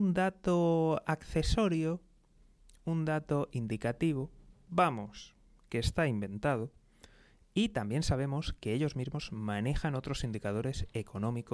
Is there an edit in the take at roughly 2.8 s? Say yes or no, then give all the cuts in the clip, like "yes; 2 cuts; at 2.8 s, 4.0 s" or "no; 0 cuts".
no; 0 cuts